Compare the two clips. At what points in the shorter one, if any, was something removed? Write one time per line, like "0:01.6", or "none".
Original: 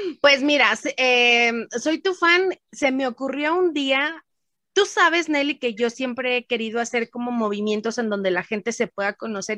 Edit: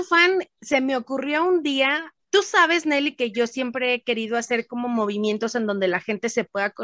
0:02.2